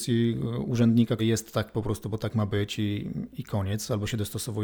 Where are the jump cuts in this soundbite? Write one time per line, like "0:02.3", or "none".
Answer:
0:01.2